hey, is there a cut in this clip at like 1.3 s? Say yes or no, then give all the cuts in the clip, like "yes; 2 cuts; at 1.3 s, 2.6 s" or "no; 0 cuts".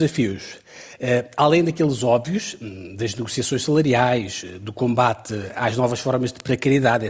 no; 0 cuts